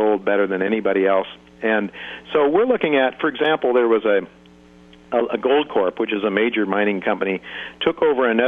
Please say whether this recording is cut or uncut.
uncut